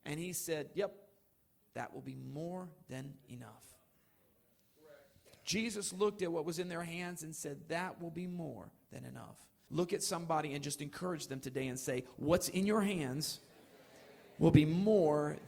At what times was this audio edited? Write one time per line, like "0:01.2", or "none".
0:01.6
0:09.7